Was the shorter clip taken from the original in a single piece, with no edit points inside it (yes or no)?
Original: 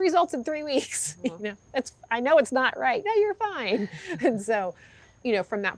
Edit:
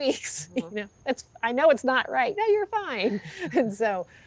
yes